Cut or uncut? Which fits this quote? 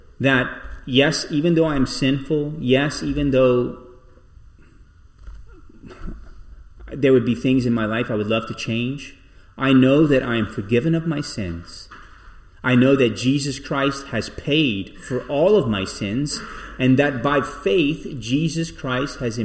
uncut